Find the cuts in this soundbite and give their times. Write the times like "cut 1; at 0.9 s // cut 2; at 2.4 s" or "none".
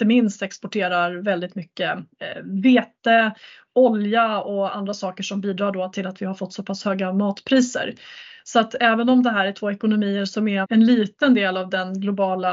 cut 1; at 10.6 s